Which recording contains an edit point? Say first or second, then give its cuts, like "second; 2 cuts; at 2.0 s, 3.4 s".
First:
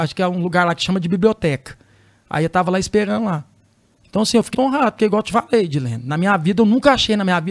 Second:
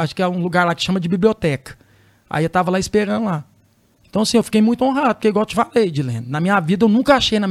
first; 1 cut; at 4.5 s